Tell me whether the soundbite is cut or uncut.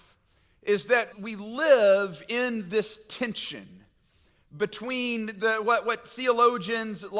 cut